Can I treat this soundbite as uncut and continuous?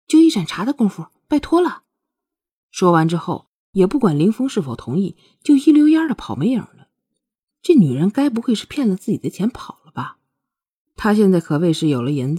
no; 1 cut; at 7.5 s

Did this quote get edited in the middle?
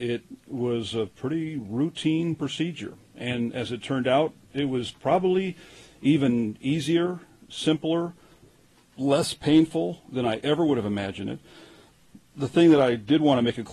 no; 0 cuts

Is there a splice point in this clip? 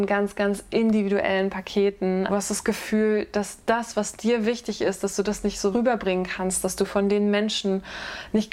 yes; 2 cuts; at 2.3 s, 5.7 s

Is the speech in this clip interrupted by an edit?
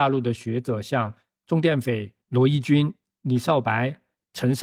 no; 0 cuts

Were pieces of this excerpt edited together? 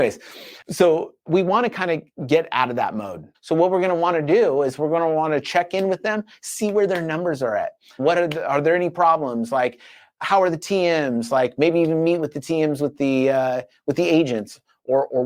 yes; 2 cuts; at 3.3 s, 8.0 s

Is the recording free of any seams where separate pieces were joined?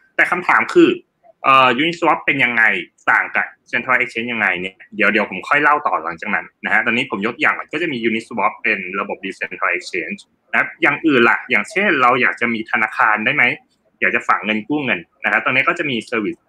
yes; 0 cuts

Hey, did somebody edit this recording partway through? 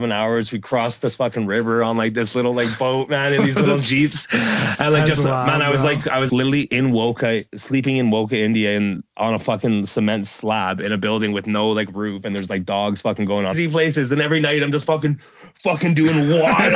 yes; 2 cuts; at 6.3 s, 13.5 s

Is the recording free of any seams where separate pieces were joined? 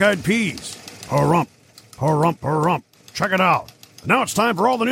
no; 1 cut; at 2.4 s

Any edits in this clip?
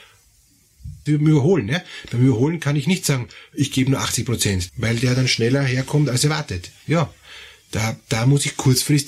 yes; 2 cuts; at 1.1 s, 4.7 s

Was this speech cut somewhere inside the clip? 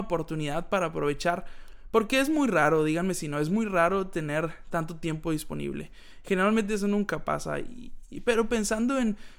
no; 0 cuts

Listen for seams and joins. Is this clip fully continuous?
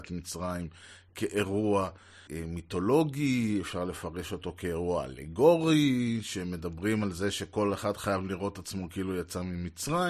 no; 1 cut; at 2.3 s

